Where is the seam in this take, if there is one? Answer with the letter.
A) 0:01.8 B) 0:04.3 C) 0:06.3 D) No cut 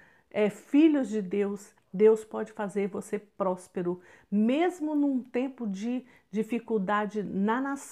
A